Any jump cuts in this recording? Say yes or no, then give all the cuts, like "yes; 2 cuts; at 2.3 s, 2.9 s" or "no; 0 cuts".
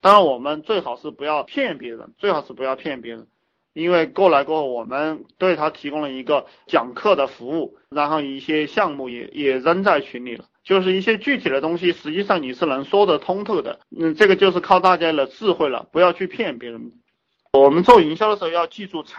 no; 0 cuts